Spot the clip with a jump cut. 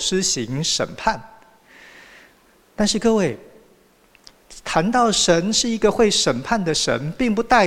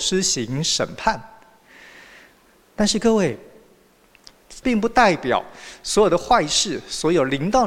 second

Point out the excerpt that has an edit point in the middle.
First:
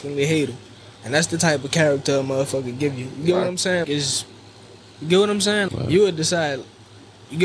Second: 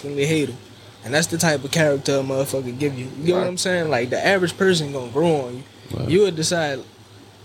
first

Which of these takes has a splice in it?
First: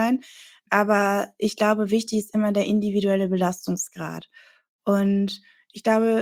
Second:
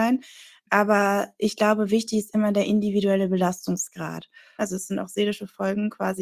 second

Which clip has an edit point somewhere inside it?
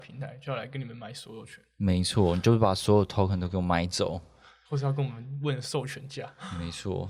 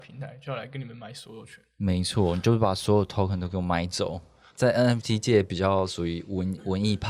second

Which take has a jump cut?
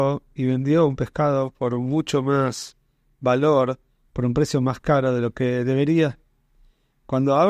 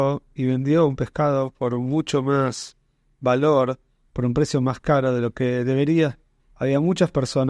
second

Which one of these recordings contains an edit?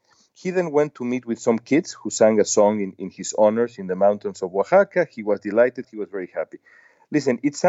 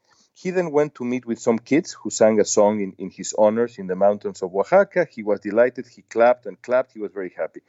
first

